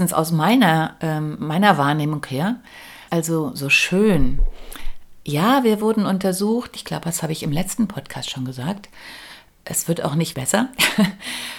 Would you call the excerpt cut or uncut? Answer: cut